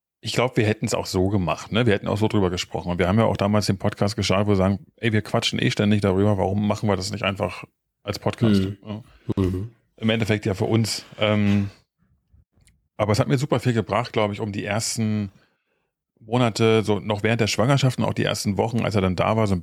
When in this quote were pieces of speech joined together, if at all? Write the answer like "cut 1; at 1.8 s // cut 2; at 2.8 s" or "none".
none

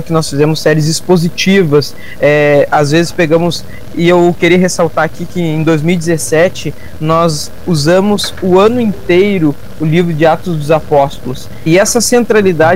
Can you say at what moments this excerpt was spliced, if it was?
cut 1; at 11.7 s

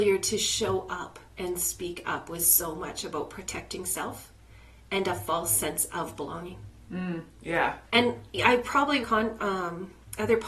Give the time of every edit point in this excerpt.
cut 1; at 7.8 s // cut 2; at 9.0 s

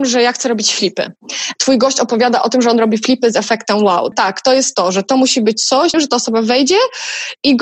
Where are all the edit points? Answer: cut 1; at 4.1 s // cut 2; at 5.9 s

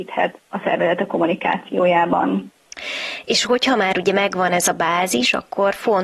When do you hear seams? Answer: none

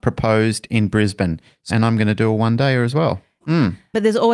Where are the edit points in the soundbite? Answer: cut 1; at 1.7 s // cut 2; at 3.4 s

